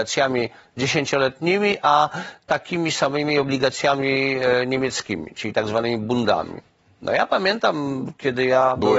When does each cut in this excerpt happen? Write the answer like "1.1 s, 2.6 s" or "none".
none